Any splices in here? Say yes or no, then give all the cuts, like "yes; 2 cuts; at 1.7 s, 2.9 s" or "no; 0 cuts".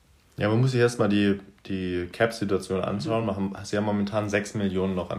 no; 0 cuts